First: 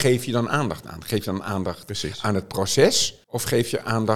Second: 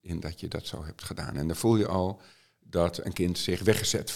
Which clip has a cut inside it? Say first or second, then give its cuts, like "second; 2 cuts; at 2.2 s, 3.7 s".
first; 1 cut; at 3.2 s